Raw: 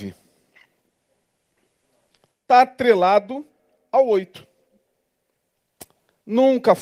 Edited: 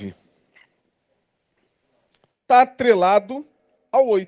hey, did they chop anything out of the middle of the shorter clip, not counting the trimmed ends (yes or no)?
no